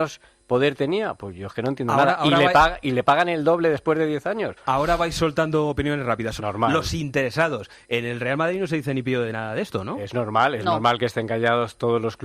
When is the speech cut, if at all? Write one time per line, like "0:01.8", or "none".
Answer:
0:06.4

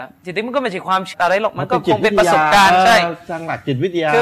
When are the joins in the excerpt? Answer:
0:01.1

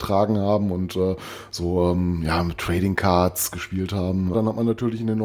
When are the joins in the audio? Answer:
0:04.3

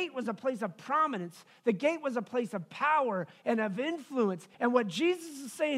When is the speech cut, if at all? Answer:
0:04.5

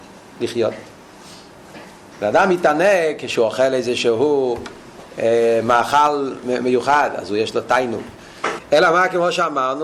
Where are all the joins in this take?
0:02.1
0:08.6

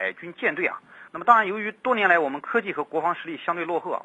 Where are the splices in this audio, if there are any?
0:01.1

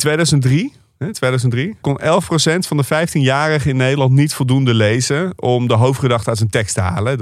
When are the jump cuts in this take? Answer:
0:01.8

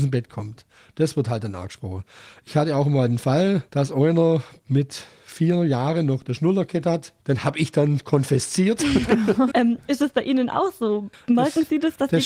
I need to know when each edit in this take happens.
0:03.7
0:07.2
0:09.5

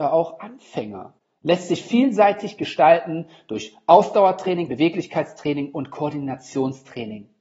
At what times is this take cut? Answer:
0:04.7

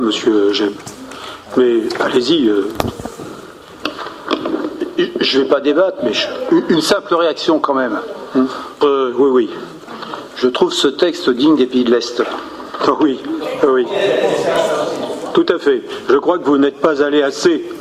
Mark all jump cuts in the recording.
0:08.8
0:10.3

